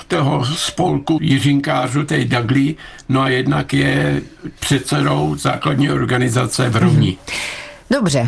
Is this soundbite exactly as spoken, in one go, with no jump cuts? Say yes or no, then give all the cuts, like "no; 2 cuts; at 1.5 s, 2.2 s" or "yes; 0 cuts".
no; 2 cuts; at 1.2 s, 4.6 s